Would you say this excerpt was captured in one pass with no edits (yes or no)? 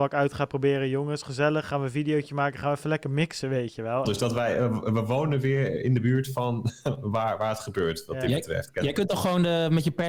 no